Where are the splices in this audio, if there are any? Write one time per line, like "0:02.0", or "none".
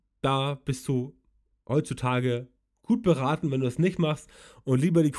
none